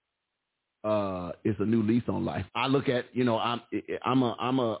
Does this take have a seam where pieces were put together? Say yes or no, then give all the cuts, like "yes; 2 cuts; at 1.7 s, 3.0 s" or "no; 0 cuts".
yes; 2 cuts; at 1.4 s, 2.5 s